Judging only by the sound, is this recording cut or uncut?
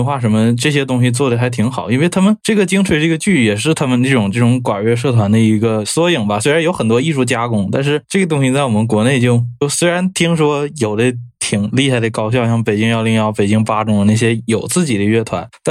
uncut